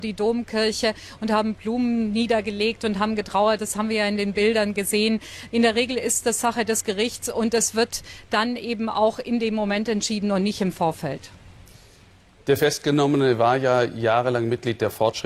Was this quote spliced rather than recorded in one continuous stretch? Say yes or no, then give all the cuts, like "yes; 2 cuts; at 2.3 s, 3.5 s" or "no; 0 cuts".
yes; 1 cut; at 5.5 s